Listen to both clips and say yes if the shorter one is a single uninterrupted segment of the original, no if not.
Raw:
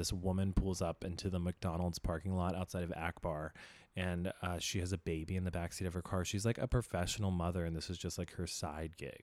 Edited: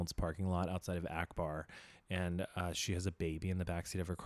yes